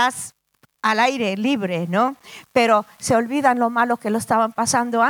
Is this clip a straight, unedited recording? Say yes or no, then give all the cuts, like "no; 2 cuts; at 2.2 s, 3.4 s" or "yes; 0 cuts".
no; 1 cut; at 2.4 s